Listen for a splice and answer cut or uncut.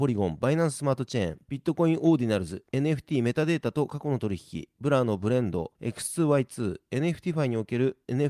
cut